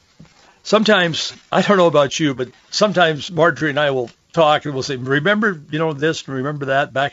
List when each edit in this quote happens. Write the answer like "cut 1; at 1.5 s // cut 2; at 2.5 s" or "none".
none